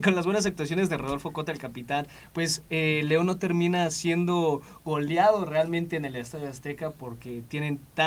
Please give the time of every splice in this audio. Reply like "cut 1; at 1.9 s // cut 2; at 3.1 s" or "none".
none